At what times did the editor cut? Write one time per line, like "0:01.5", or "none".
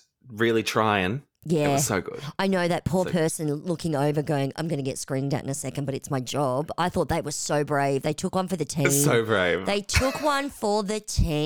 none

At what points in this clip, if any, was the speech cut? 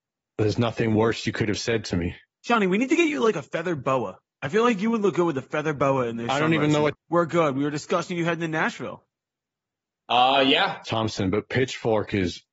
0:06.9
0:10.8

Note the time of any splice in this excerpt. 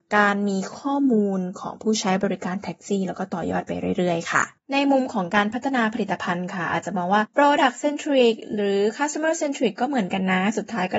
none

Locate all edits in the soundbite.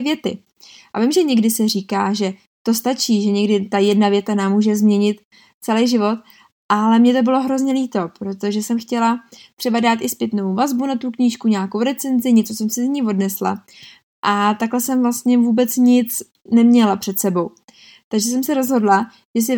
none

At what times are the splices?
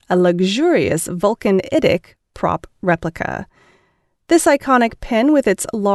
none

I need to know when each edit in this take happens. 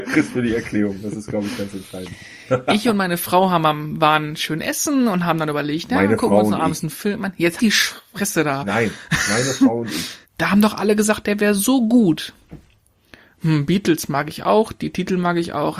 0:07.6
0:10.2

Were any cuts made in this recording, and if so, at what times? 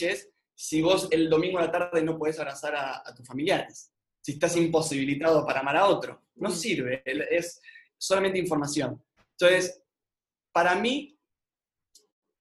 none

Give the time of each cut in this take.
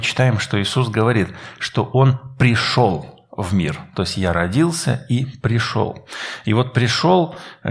none

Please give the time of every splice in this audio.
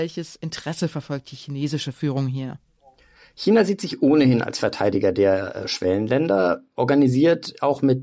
none

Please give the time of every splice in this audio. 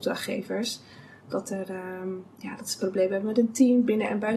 none

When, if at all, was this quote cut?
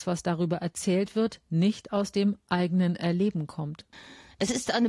none

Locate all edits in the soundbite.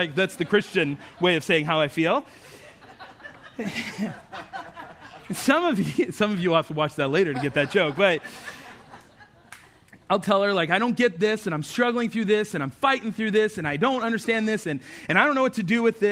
0:14.6

